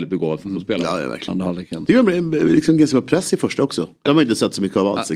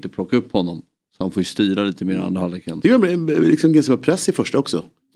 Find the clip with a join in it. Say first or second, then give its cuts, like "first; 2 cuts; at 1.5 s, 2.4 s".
first; 2 cuts; at 1.3 s, 4.1 s